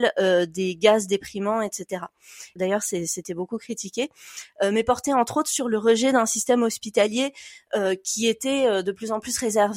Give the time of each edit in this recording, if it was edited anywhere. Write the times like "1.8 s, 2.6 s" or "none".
2.6 s

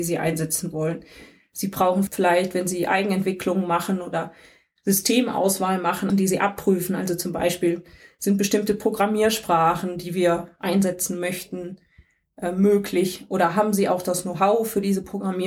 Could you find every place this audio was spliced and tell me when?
6.1 s

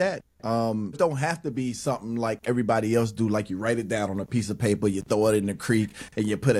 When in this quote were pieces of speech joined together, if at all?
0.9 s

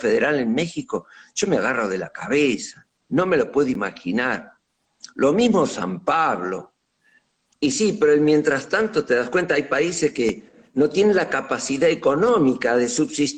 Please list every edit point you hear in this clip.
7.5 s

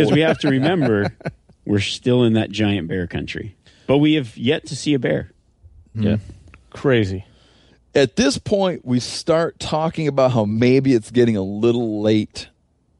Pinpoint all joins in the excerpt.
5.9 s

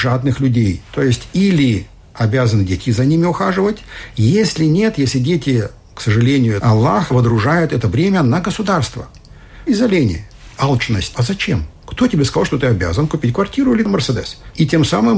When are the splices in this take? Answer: 6.6 s, 9.7 s, 11.1 s

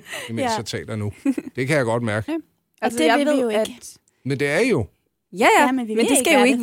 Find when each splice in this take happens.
2.3 s

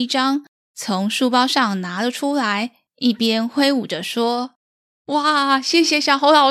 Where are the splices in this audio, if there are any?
2.9 s

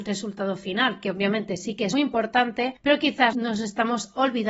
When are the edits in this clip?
1.9 s

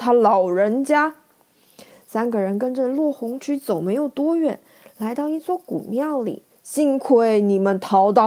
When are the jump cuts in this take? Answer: 6.5 s

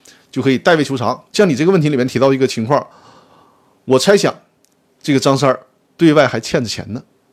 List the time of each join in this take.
1.3 s

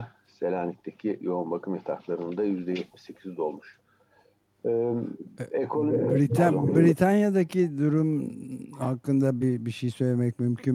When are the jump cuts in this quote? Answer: none

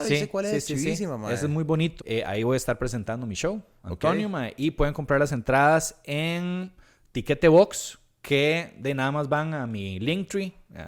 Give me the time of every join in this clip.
2.0 s

